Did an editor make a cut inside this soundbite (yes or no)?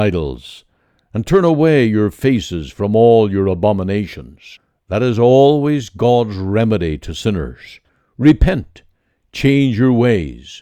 no